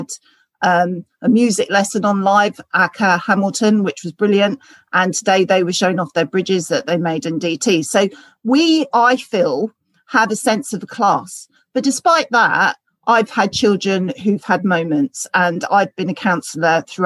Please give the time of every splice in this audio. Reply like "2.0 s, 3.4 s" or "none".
8.9 s